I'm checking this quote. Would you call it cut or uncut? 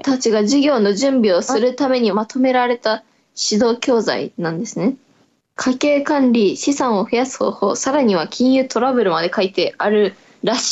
uncut